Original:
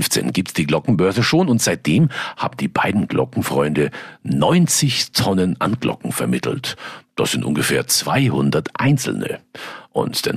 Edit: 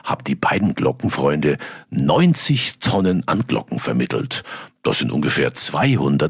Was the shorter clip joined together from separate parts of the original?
no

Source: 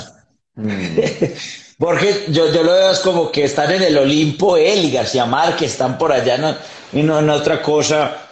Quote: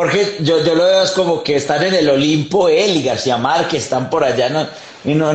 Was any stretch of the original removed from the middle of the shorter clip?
no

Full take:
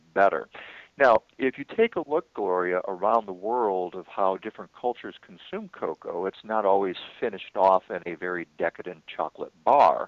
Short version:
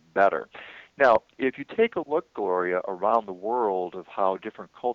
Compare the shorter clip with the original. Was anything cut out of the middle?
no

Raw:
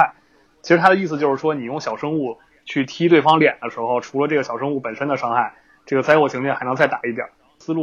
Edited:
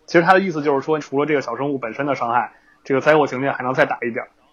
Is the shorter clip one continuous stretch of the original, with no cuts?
no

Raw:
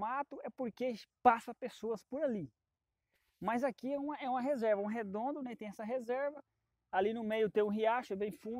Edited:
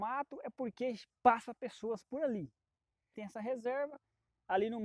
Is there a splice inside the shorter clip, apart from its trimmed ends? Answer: yes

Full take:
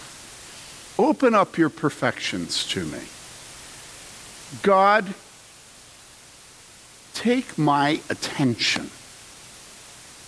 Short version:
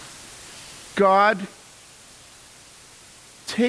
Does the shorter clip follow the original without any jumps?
no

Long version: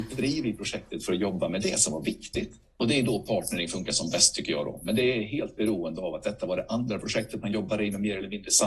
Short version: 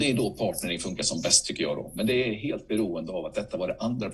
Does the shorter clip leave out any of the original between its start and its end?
no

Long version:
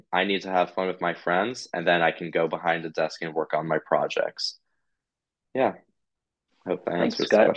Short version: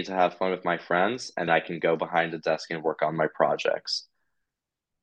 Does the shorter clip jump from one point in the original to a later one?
yes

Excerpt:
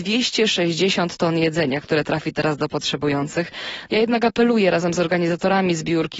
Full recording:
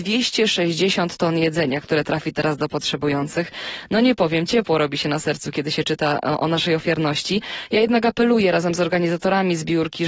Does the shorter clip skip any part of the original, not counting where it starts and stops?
yes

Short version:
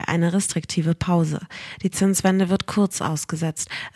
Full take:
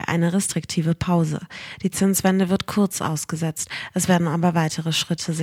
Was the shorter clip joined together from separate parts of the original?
no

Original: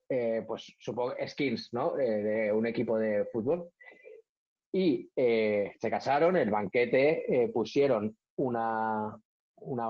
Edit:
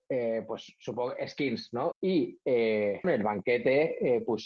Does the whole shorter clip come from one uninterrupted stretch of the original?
no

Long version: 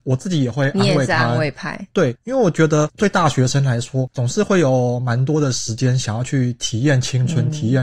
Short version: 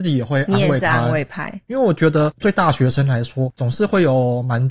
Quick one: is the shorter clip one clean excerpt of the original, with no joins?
no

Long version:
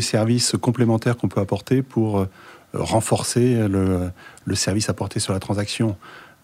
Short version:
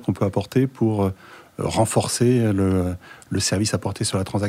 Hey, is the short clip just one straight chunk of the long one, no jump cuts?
yes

